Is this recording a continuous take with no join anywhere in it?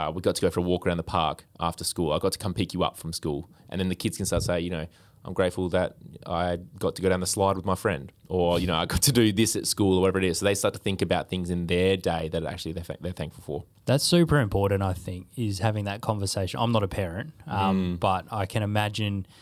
yes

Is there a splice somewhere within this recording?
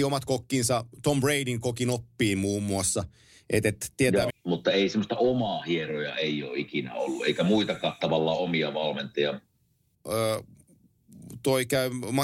yes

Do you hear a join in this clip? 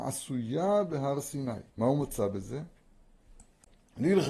yes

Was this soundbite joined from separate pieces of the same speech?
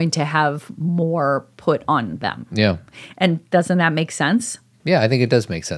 yes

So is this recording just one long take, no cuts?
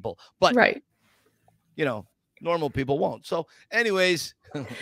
yes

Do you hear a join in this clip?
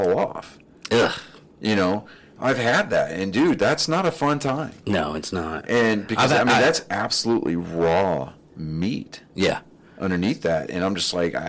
no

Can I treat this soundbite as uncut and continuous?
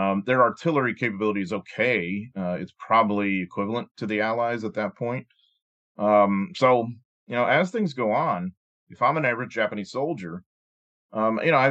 yes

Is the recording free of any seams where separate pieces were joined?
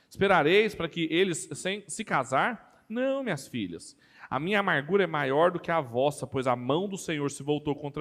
yes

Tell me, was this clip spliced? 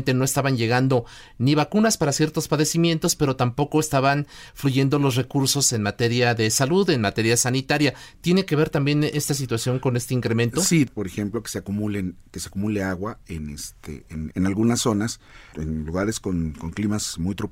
yes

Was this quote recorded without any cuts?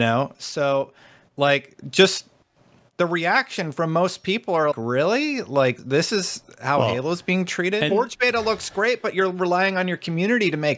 no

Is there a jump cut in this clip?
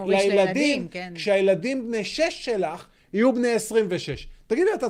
no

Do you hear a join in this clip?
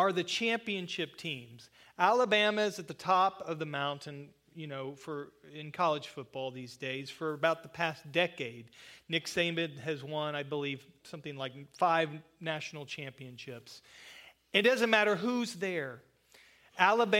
no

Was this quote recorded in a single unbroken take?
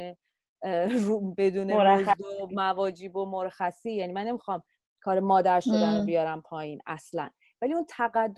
yes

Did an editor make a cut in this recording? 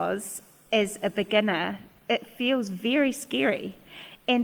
no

